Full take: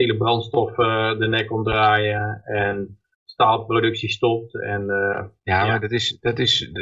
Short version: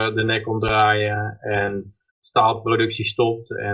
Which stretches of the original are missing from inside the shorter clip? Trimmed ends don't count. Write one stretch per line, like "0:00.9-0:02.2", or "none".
none